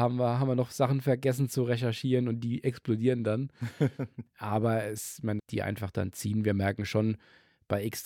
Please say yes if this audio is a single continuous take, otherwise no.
no